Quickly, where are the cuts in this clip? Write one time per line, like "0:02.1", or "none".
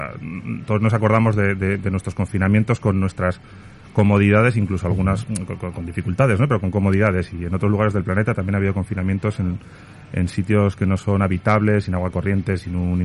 none